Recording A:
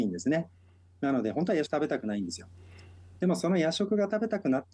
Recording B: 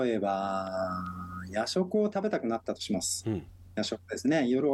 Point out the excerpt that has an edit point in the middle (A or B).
A